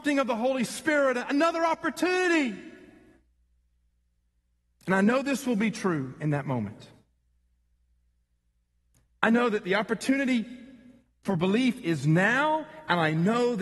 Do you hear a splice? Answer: no; 0 cuts

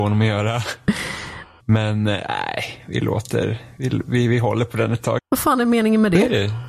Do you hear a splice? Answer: yes; 2 cuts; at 1.6 s, 5.2 s

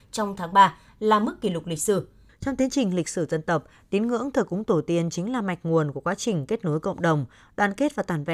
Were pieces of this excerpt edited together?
yes; 1 cut; at 2.3 s

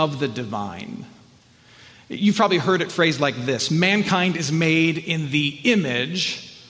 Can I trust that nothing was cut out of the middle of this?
yes; 0 cuts

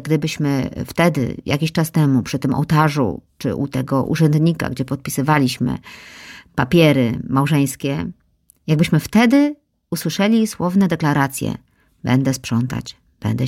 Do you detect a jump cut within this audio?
no; 0 cuts

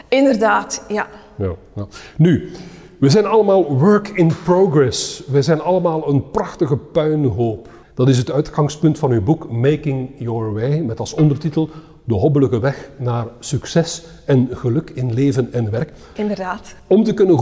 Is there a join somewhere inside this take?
yes; 2 cuts; at 7.8 s, 16.2 s

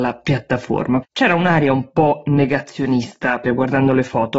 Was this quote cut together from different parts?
yes; 2 cuts; at 1.0 s, 3.4 s

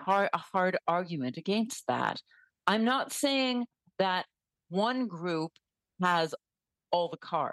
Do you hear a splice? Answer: no; 0 cuts

